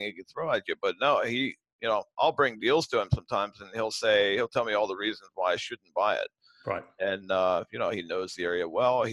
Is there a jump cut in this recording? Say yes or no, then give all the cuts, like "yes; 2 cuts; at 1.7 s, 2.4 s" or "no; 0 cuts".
no; 0 cuts